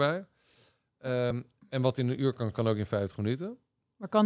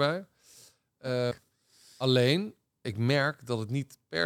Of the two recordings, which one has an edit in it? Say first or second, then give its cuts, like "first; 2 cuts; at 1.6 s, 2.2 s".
second; 2 cuts; at 1.3 s, 2.8 s